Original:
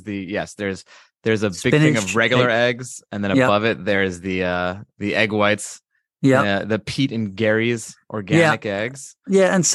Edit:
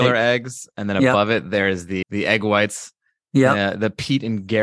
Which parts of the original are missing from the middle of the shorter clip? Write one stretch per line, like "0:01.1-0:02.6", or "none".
0:04.4-0:04.9